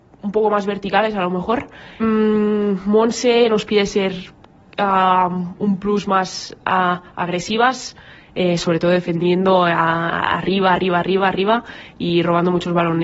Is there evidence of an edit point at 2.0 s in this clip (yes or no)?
yes